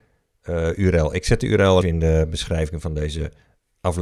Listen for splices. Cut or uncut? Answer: cut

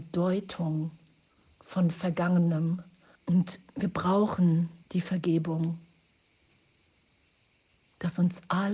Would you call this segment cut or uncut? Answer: cut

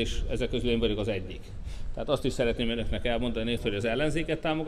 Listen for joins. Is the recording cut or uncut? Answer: cut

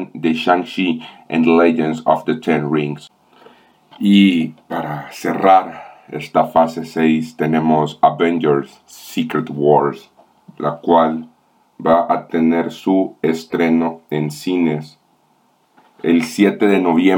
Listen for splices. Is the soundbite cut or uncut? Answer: uncut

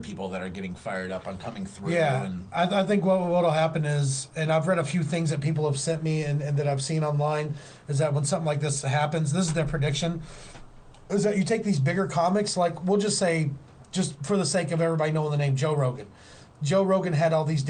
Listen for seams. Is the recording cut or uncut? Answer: uncut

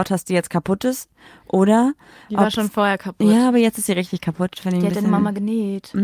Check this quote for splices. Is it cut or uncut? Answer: uncut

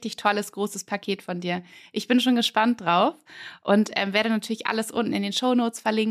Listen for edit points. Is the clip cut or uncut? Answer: uncut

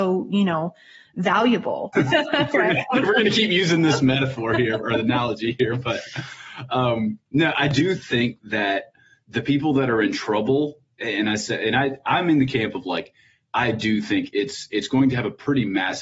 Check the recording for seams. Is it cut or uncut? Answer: cut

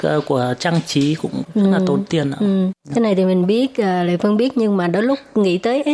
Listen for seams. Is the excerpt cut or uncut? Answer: uncut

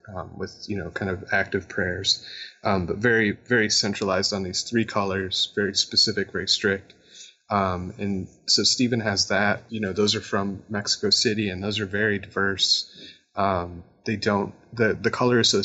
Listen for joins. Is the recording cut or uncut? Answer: cut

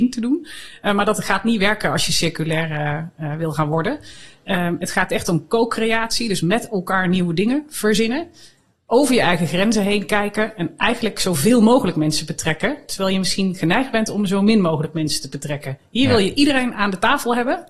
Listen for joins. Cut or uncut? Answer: uncut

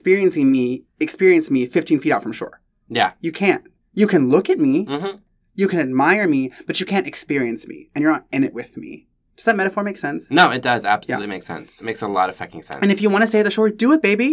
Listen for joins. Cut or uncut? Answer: uncut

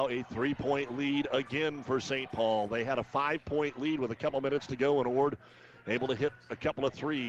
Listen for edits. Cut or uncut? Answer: uncut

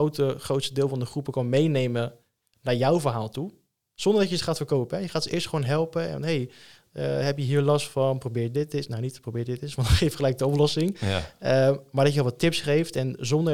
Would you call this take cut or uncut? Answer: uncut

